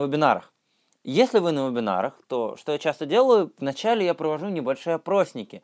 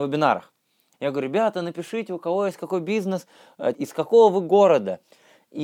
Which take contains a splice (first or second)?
second